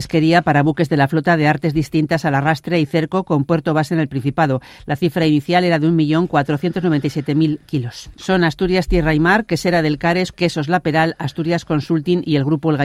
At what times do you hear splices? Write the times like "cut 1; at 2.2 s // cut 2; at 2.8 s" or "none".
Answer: cut 1; at 8.2 s // cut 2; at 10.3 s